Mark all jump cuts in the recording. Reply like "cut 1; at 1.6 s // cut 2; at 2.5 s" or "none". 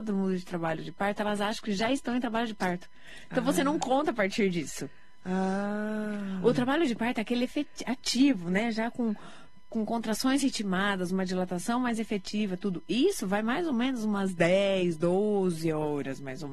none